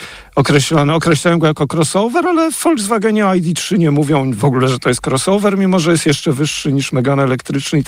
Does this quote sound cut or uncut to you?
uncut